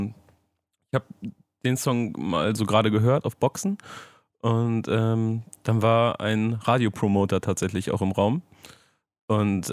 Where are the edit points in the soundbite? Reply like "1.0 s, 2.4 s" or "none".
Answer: none